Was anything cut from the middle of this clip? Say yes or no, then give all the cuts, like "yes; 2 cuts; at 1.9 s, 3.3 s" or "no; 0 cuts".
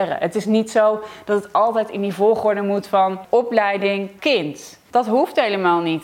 yes; 1 cut; at 4.2 s